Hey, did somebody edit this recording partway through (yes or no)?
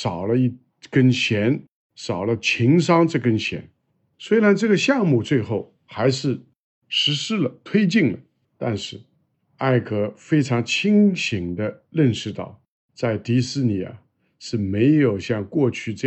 no